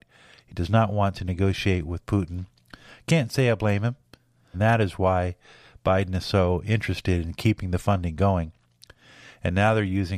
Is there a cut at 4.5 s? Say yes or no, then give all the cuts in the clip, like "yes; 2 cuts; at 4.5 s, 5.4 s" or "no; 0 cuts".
yes; 1 cut; at 4.5 s